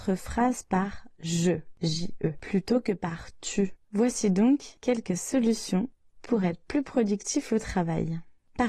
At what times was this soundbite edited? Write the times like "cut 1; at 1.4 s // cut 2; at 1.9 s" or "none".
cut 1; at 3.8 s